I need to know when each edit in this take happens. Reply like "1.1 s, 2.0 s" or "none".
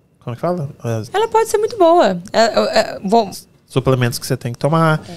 1.0 s, 3.3 s

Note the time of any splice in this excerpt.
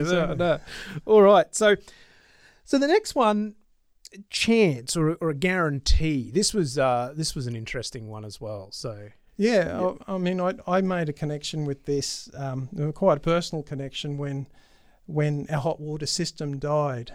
none

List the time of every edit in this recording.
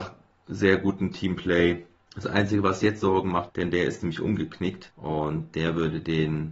3.5 s

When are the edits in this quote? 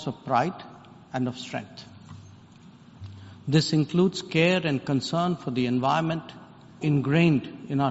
6.8 s

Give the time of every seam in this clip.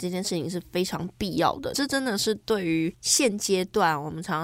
1.7 s

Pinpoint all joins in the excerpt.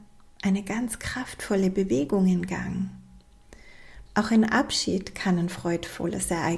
4.1 s

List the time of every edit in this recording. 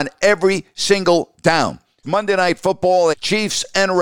2.0 s, 3.1 s

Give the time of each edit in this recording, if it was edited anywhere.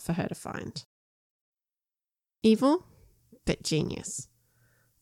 none

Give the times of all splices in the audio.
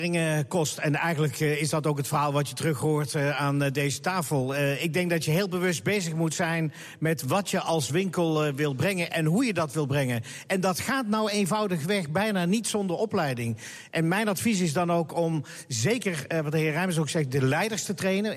none

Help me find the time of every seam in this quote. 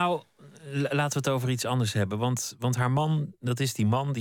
none

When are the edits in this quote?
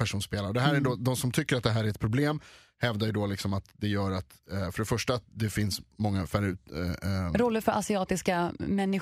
none

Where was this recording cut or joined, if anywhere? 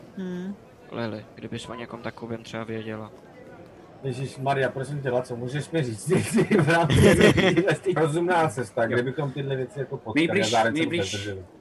8.0 s

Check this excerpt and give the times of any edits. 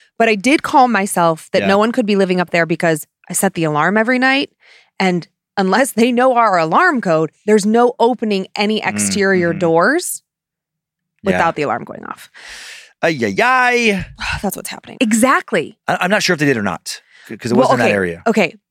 13.4 s, 15.0 s

